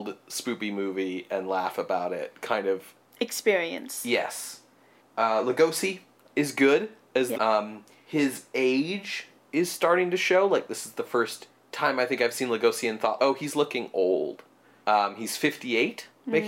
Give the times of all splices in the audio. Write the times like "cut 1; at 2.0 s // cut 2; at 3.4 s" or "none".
cut 1; at 5.0 s // cut 2; at 7.3 s // cut 3; at 13.2 s